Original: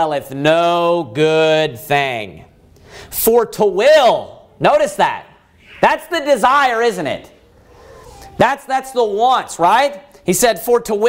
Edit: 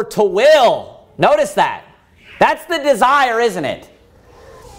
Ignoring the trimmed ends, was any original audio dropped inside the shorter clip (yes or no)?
no